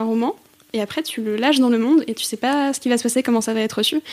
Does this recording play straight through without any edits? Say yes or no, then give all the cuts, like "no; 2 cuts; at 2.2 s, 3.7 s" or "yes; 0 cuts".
yes; 0 cuts